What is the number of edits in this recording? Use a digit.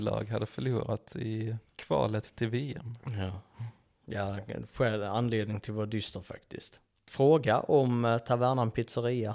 2